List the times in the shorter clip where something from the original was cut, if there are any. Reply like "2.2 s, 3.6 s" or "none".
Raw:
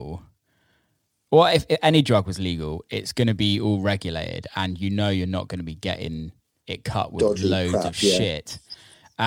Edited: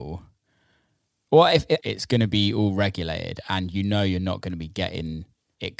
1.8 s